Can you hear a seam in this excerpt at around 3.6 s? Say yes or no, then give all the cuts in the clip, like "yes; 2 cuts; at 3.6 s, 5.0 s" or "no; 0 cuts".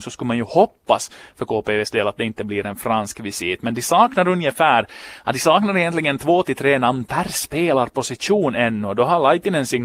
no; 0 cuts